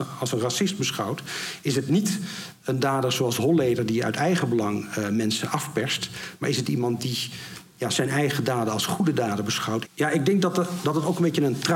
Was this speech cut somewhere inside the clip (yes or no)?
yes